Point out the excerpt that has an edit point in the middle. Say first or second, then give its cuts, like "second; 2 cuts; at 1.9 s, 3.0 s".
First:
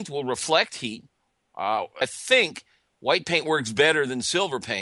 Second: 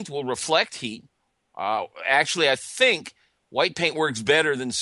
first; 1 cut; at 2.0 s